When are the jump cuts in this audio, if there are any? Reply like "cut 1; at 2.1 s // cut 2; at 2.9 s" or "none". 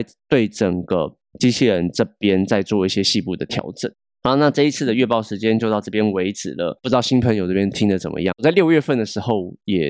none